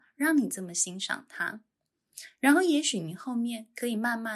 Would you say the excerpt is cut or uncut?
uncut